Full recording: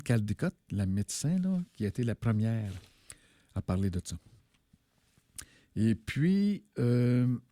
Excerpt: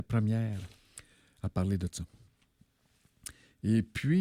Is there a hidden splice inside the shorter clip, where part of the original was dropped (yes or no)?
no